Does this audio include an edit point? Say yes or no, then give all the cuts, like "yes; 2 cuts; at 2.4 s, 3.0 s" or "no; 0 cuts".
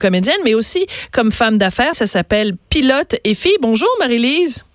yes; 1 cut; at 1.9 s